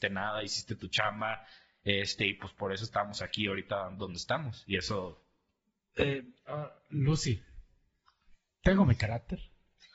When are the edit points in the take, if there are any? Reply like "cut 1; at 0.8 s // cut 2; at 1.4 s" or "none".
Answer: cut 1; at 6.5 s